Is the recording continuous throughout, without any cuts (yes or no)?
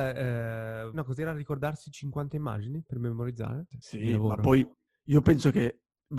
no